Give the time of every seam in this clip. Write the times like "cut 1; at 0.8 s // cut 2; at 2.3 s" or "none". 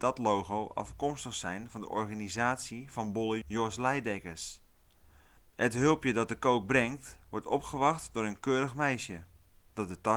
cut 1; at 3.4 s // cut 2; at 5.4 s